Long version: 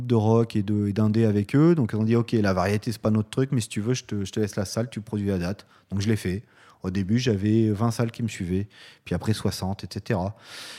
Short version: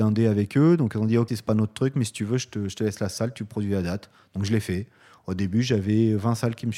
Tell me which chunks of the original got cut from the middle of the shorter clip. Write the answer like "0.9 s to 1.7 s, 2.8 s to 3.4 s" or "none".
2.3 s to 2.8 s